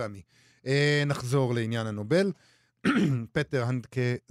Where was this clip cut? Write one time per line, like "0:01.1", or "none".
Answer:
none